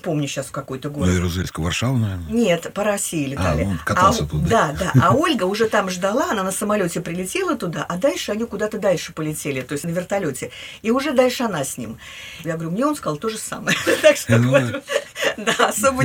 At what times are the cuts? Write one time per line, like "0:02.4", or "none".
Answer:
0:09.8
0:12.4